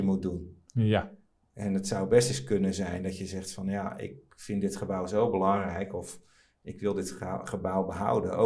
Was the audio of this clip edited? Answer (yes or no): no